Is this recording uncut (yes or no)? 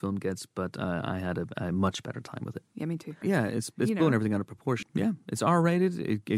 no